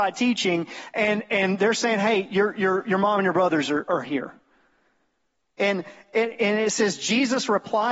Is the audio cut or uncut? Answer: uncut